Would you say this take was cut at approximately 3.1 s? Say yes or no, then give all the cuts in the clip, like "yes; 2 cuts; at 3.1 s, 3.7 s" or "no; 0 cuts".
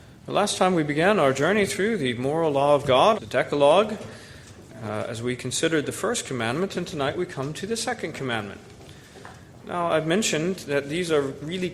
yes; 1 cut; at 3.1 s